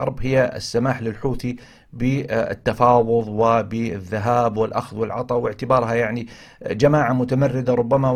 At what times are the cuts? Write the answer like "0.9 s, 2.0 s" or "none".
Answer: none